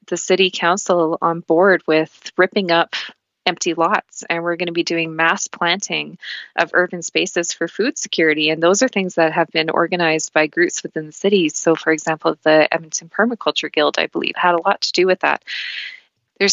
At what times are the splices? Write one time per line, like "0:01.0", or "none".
none